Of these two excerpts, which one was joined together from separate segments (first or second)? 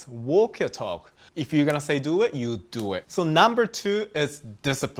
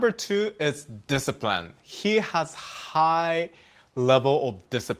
first